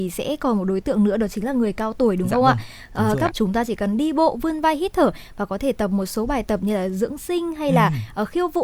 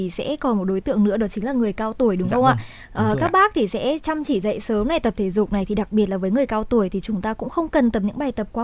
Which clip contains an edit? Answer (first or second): first